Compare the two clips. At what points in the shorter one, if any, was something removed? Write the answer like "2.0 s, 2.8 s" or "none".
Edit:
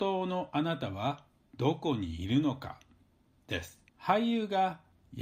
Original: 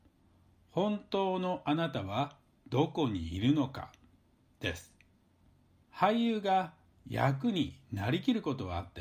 3.9 s